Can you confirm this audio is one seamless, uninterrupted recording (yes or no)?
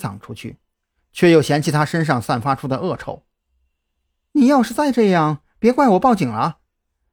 yes